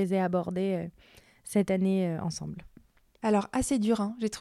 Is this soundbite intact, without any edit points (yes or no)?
yes